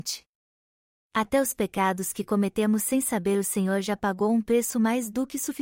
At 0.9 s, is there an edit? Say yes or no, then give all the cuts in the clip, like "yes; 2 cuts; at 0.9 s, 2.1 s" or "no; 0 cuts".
yes; 1 cut; at 0.9 s